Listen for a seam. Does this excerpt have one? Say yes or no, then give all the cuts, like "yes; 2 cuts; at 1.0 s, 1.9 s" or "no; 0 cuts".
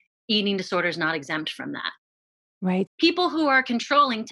yes; 1 cut; at 2.9 s